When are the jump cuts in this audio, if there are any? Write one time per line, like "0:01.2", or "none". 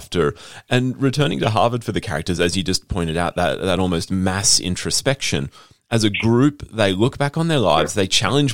0:02.4